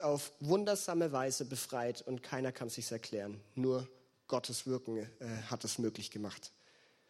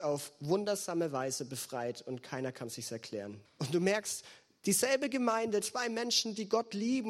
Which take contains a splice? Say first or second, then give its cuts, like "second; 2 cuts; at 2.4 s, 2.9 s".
second; 2 cuts; at 3.4 s, 5.6 s